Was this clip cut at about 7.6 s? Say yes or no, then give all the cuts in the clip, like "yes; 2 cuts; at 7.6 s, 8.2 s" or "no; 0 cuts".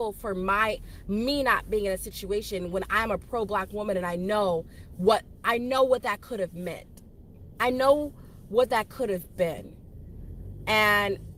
no; 0 cuts